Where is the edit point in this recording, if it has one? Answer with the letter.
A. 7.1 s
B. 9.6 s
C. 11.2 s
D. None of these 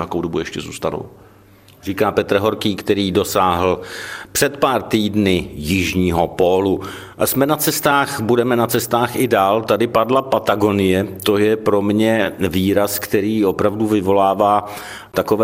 D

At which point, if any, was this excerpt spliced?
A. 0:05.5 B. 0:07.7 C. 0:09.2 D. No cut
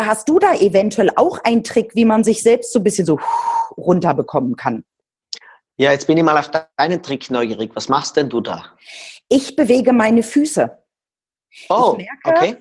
D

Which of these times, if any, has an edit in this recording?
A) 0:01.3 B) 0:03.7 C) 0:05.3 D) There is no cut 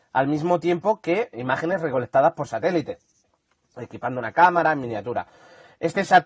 A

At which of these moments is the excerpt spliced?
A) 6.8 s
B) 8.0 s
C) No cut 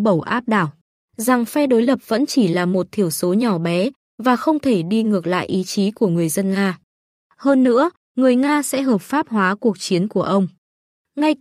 B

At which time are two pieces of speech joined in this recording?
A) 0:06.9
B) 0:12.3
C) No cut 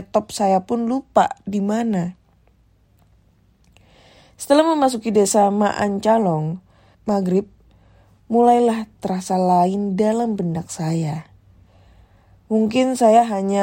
A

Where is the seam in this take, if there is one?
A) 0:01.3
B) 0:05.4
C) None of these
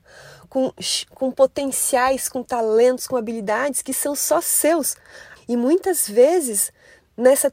B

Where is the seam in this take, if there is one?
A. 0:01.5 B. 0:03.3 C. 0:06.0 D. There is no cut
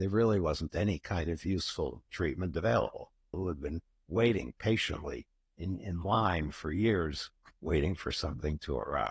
B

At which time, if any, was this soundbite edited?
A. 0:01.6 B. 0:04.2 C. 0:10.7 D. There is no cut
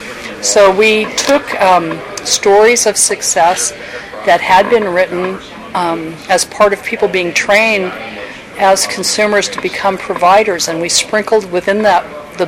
D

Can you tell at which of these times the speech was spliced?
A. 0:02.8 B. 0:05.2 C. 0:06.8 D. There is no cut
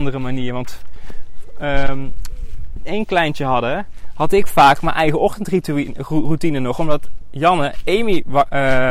A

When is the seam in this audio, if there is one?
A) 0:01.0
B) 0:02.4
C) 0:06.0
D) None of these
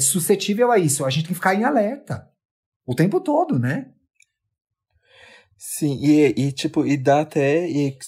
D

